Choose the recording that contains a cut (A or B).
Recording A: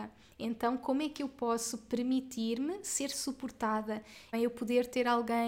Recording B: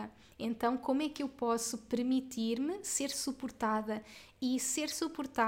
A